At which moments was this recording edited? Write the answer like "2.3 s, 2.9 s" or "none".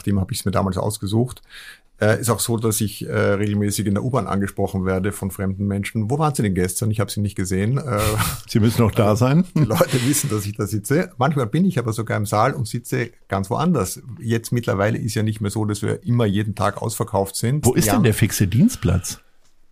17.6 s